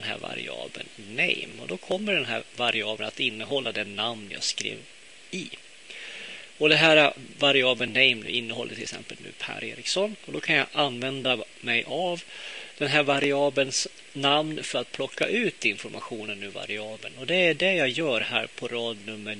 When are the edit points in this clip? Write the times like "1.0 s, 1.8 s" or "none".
none